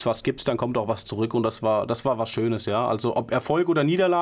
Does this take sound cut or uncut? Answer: uncut